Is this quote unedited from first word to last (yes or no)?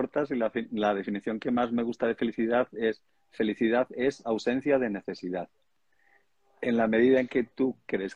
yes